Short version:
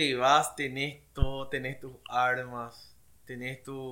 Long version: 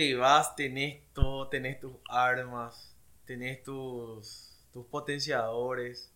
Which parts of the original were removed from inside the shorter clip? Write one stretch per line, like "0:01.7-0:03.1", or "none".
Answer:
none